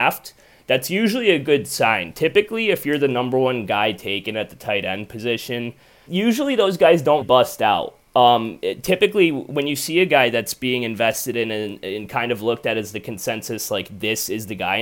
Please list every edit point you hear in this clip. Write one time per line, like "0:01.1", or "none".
0:06.1
0:07.2